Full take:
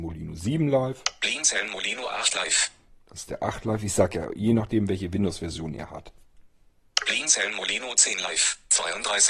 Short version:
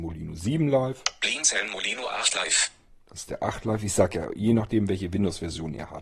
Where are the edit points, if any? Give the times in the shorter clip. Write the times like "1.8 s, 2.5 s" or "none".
none